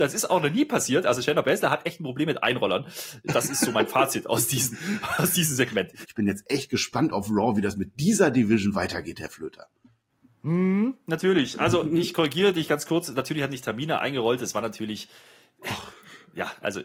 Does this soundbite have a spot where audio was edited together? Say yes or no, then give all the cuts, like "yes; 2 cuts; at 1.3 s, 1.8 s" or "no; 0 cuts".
yes; 1 cut; at 6.0 s